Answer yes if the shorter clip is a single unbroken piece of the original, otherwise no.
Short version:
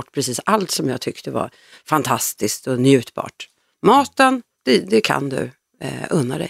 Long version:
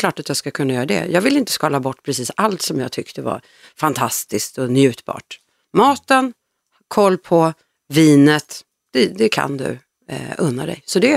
no